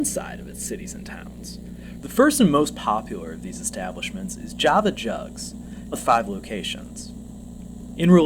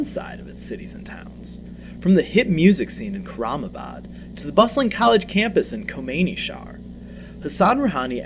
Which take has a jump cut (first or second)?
first